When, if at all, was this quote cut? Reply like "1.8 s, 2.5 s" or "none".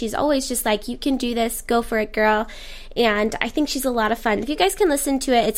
4.4 s